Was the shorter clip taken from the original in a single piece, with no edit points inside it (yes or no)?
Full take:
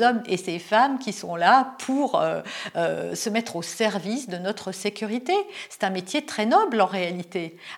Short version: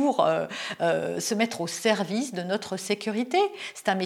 yes